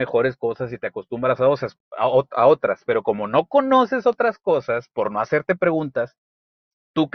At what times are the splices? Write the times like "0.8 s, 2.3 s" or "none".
none

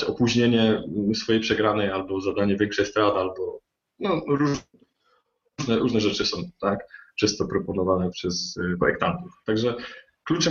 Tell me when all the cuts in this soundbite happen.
8.1 s

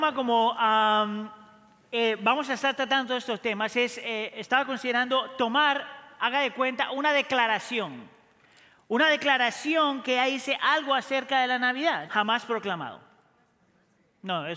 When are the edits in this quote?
12.0 s

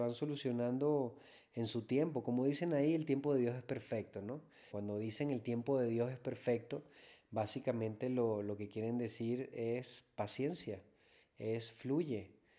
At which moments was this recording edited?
4.7 s

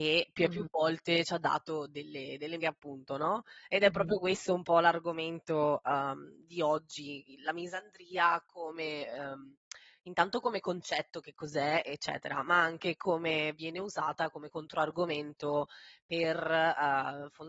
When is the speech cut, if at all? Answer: 2.6 s

